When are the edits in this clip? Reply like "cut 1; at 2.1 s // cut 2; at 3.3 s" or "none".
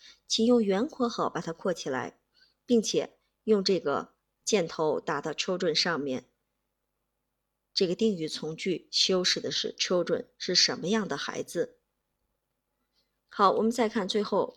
none

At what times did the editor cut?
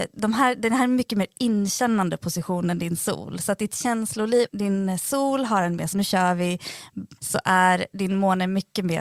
cut 1; at 4.5 s // cut 2; at 5.9 s // cut 3; at 7.2 s

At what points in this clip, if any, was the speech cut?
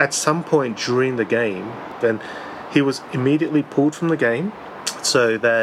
cut 1; at 2.0 s

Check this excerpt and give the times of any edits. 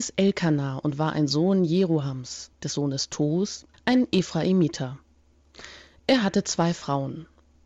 cut 1; at 2.5 s // cut 2; at 3.7 s

